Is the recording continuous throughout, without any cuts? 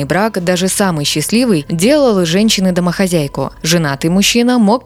yes; 0 cuts

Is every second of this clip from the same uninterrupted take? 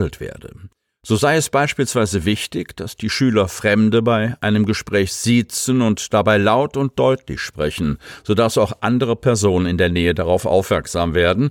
yes; 0 cuts

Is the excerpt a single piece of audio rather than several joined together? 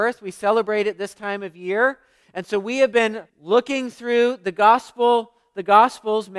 no; 2 cuts; at 2.2 s, 3.3 s

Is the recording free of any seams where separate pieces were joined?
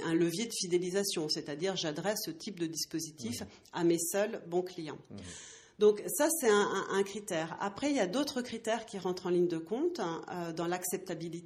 yes; 0 cuts

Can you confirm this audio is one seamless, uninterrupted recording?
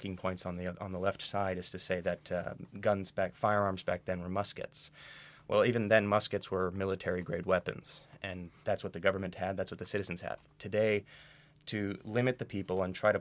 yes; 0 cuts

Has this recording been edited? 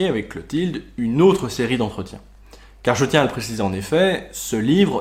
no; 0 cuts

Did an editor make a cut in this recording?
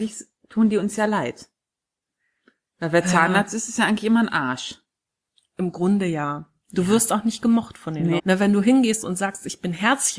yes; 1 cut; at 8.2 s

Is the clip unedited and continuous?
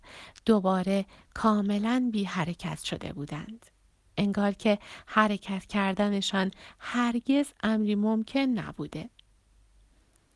yes; 0 cuts

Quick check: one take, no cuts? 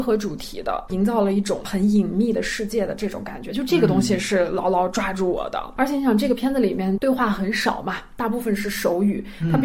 yes; 0 cuts

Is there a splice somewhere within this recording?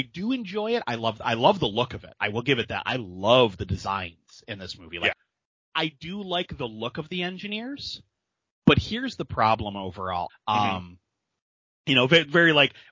yes; 2 cuts; at 5.1 s, 10.3 s

